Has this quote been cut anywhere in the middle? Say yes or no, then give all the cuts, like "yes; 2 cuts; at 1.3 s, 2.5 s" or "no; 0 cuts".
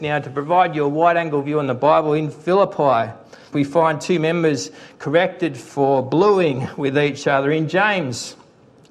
yes; 1 cut; at 3.5 s